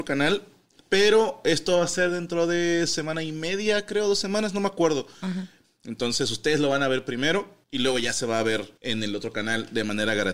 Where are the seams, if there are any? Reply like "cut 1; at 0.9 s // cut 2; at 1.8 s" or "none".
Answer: cut 1; at 5.6 s // cut 2; at 7.6 s // cut 3; at 8.8 s